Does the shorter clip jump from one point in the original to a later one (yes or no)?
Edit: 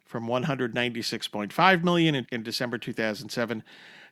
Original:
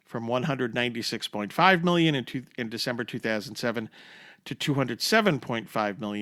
yes